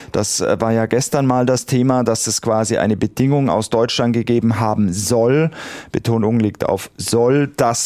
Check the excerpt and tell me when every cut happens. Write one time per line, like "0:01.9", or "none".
none